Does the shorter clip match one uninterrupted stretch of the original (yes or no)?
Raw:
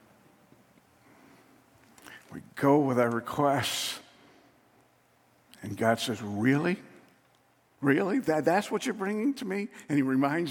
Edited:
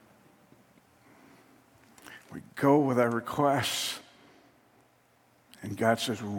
yes